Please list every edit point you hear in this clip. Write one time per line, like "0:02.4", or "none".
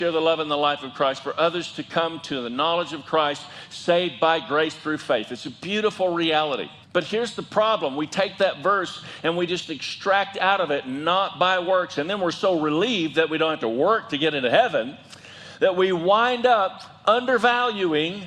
0:06.8